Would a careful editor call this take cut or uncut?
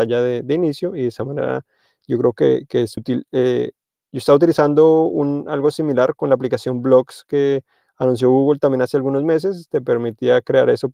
cut